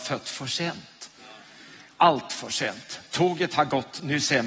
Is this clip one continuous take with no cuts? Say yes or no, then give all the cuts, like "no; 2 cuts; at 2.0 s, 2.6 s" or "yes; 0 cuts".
yes; 0 cuts